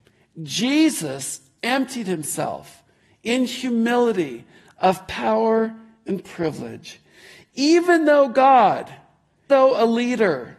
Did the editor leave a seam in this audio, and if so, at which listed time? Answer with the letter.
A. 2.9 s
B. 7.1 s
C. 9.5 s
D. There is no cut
C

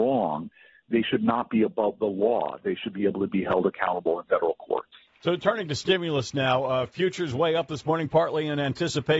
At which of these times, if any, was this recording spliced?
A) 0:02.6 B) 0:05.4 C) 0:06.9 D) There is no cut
D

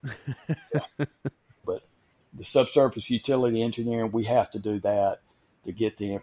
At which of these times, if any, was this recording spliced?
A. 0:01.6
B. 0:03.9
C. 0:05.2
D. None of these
A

